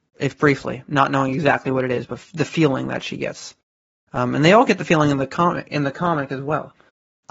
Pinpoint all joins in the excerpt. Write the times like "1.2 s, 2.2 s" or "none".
none

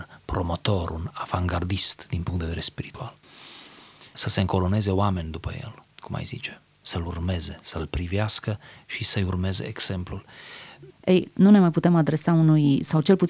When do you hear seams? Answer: 10.9 s

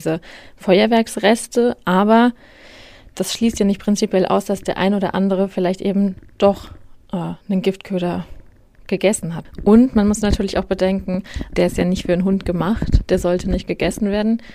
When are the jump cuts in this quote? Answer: 11.5 s

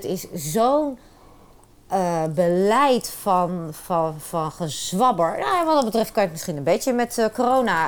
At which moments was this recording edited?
none

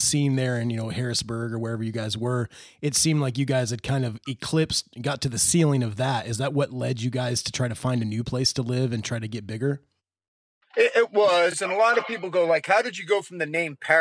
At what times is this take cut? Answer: none

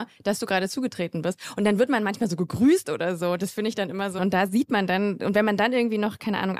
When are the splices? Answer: 4.2 s

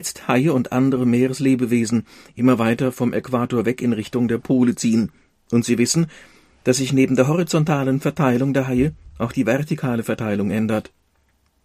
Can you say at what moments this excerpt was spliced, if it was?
none

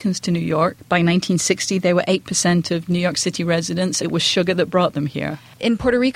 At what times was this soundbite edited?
4.0 s

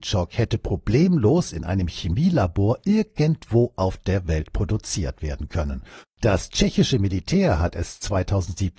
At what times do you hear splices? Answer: 6.0 s

